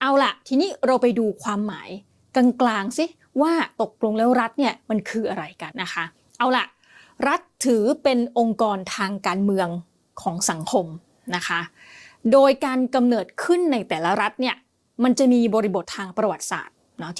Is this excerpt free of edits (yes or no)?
no